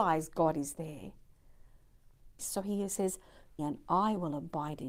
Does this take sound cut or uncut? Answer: cut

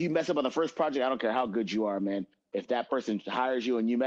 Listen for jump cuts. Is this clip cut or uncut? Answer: cut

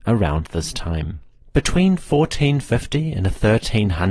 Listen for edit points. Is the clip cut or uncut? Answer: uncut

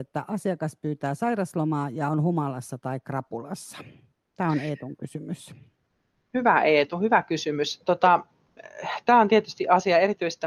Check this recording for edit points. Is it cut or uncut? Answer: uncut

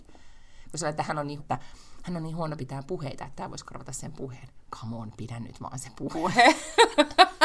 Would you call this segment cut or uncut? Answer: cut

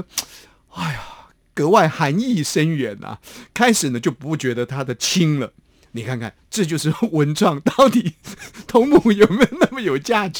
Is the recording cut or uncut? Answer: uncut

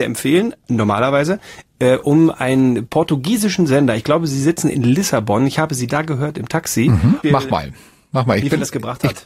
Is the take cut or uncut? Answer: cut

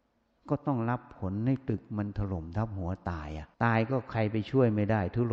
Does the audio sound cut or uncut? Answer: cut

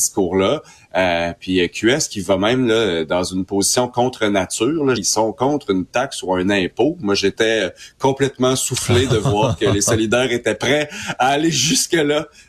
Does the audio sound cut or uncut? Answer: cut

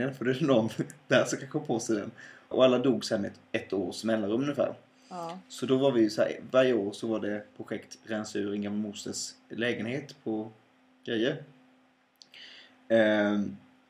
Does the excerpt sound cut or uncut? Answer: cut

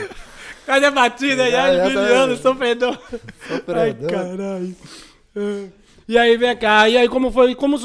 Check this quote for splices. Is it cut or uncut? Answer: uncut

